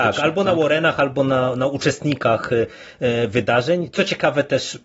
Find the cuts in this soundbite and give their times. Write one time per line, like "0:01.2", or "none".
none